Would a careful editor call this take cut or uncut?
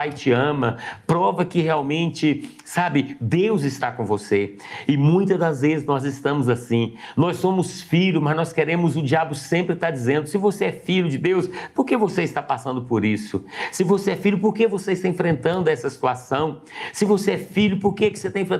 uncut